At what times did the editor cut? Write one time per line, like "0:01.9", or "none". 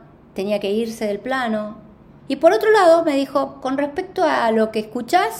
0:02.2